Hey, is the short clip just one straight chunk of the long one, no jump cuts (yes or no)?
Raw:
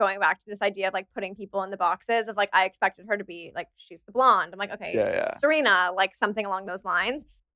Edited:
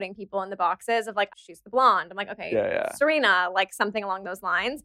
no